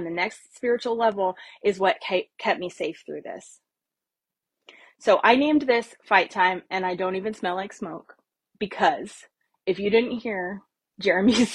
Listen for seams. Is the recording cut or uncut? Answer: uncut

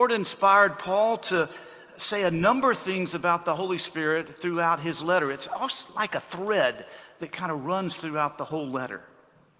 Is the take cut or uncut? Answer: uncut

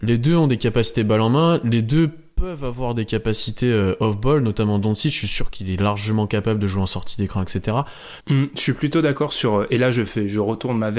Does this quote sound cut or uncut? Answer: cut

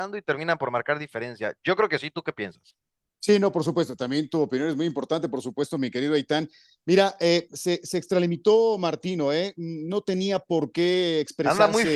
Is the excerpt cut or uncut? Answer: uncut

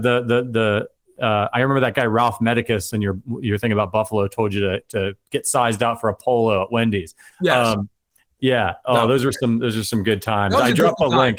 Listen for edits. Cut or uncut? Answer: uncut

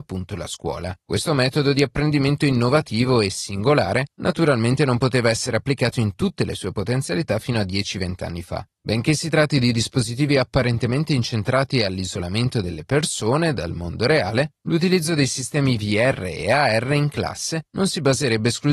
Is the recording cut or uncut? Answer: cut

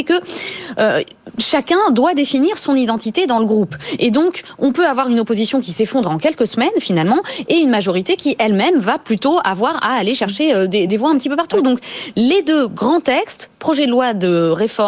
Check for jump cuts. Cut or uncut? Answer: cut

